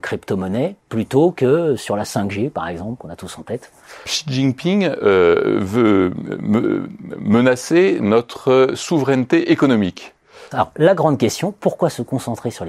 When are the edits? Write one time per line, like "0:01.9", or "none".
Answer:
0:04.1
0:10.5